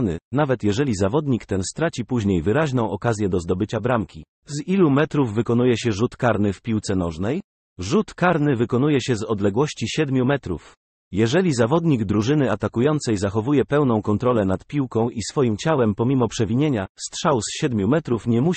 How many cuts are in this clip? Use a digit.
1